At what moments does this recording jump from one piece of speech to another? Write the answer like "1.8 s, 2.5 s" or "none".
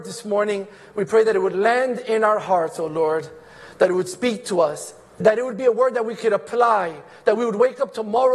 5.2 s